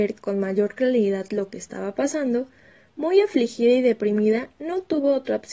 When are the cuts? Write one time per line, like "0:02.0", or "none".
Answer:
none